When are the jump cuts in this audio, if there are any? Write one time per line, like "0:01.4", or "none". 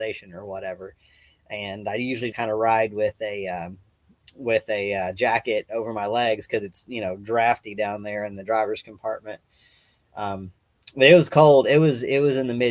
0:02.3